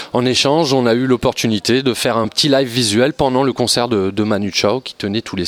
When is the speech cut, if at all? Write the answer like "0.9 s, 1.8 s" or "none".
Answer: 2.2 s

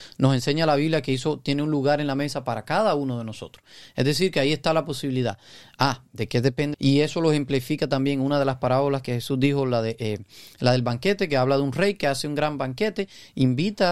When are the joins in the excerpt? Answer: 6.7 s

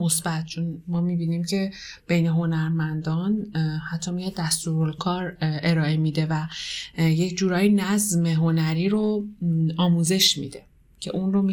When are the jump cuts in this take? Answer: 5.0 s

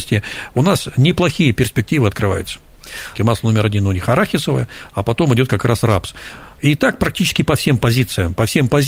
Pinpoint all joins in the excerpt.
3.2 s, 6.6 s

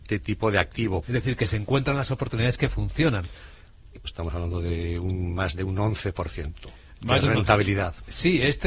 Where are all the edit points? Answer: 1.0 s, 4.0 s

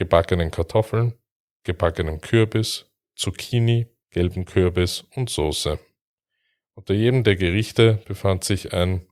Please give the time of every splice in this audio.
4.0 s

